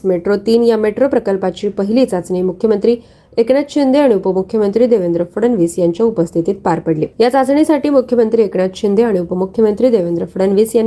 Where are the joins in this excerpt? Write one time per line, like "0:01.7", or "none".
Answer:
0:07.1